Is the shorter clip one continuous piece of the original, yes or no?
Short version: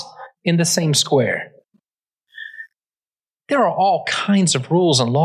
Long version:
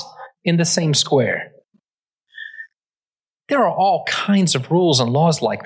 yes